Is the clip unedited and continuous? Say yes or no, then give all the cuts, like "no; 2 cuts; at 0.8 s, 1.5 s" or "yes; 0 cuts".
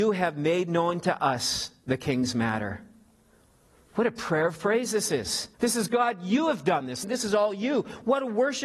no; 2 cuts; at 5.5 s, 7.0 s